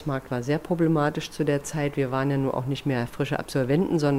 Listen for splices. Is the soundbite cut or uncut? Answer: uncut